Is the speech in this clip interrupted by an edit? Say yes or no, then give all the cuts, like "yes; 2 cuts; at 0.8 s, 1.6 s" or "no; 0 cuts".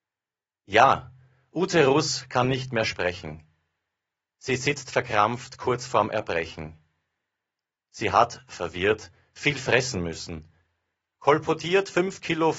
no; 0 cuts